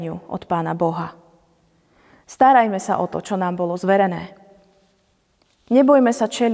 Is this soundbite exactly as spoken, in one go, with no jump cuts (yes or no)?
yes